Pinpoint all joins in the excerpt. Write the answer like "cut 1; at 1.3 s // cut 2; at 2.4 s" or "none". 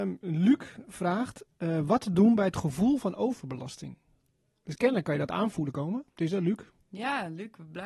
cut 1; at 6.1 s